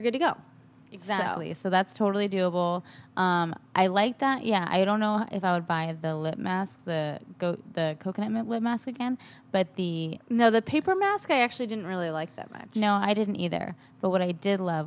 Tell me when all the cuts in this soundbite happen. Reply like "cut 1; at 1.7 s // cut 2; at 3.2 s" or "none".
none